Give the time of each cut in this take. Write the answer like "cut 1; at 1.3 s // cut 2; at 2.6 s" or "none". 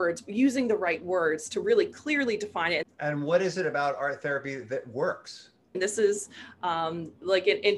cut 1; at 2.8 s // cut 2; at 5.7 s